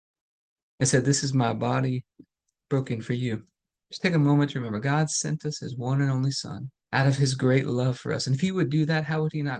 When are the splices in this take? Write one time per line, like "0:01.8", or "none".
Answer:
0:03.8
0:06.8